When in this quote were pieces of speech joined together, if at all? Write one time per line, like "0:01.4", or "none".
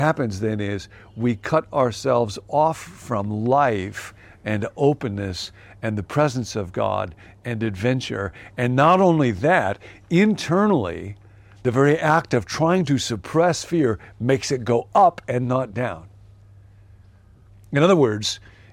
none